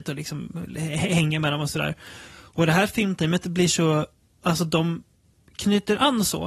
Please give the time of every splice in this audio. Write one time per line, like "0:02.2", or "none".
none